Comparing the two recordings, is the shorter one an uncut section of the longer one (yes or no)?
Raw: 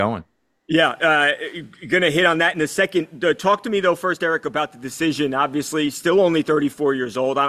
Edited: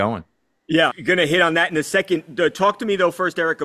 no